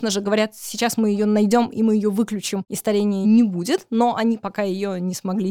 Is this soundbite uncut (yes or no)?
yes